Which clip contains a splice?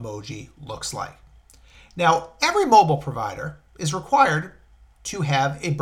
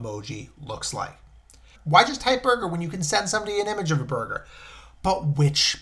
second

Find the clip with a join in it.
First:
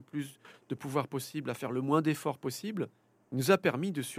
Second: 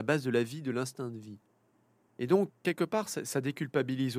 second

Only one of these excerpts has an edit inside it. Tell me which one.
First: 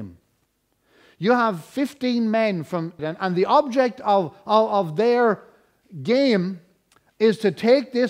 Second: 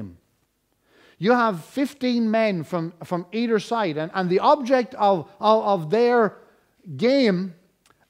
first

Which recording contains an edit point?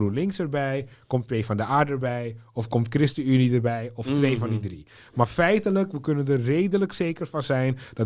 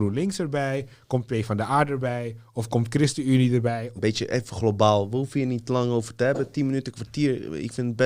second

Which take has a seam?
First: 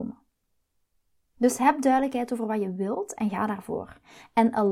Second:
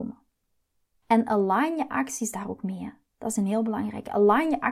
second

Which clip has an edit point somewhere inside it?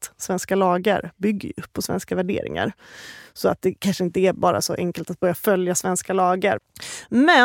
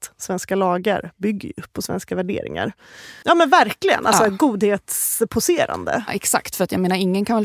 second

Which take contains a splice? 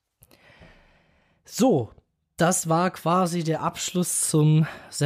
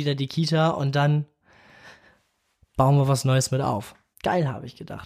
second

